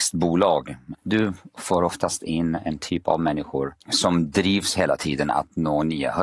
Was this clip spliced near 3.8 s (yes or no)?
yes